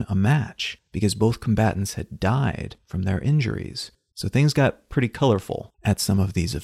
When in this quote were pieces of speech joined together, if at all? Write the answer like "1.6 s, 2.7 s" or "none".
4.1 s